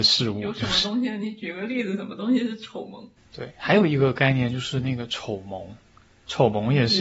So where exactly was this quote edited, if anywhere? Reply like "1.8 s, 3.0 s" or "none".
3.2 s